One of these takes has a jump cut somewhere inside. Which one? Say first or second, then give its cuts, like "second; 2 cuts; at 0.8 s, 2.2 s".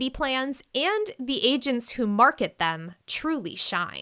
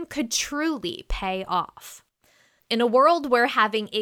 second; 1 cut; at 2.6 s